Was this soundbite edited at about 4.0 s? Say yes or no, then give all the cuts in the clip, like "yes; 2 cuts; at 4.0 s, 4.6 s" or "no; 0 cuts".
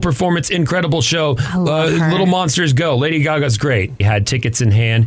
yes; 1 cut; at 4.0 s